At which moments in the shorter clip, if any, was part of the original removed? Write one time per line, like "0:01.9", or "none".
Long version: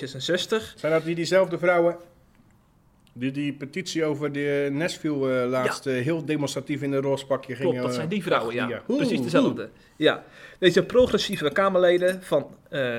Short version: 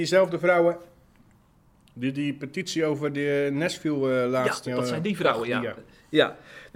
0:04.7
0:05.8